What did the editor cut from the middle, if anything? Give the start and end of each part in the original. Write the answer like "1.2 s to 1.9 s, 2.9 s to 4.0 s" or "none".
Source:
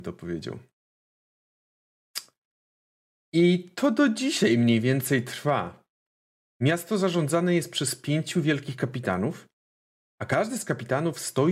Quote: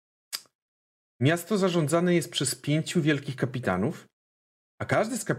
2.8 s to 6.4 s